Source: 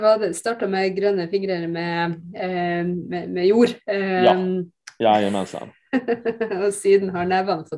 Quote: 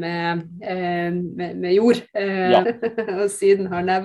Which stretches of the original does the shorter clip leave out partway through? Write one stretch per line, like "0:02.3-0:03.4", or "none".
0:04.4-0:06.1